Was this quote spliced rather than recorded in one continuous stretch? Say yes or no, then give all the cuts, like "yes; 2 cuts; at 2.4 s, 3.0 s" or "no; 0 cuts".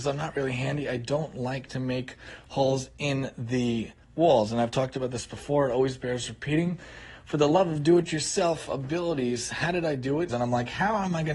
yes; 1 cut; at 10.3 s